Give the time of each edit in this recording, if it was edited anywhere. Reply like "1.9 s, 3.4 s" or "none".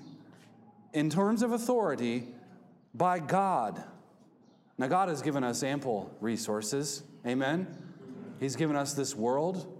none